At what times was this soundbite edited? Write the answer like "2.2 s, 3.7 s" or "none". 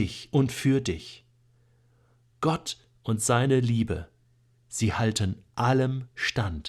2.3 s